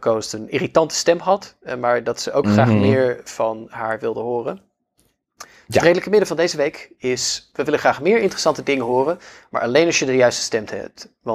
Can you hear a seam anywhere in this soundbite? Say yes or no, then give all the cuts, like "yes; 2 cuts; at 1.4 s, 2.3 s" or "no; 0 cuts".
no; 0 cuts